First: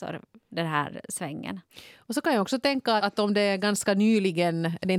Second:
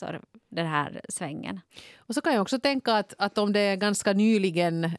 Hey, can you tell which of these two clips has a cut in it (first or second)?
first